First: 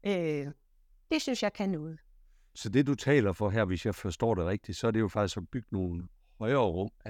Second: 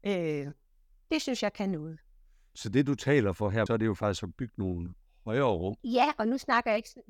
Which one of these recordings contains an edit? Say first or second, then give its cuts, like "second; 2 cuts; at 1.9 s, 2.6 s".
second; 2 cuts; at 3.7 s, 5.8 s